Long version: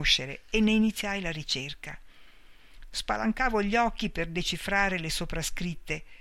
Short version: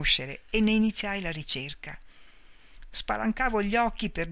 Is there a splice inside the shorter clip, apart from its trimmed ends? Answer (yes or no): no